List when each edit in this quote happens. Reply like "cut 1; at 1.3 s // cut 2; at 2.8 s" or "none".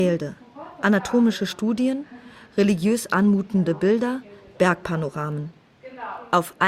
none